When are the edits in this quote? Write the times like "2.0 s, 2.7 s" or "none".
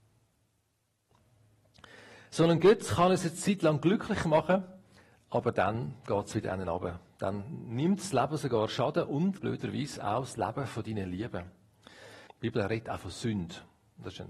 9.4 s, 12.3 s